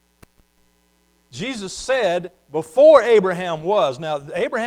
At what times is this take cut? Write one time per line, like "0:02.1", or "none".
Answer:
none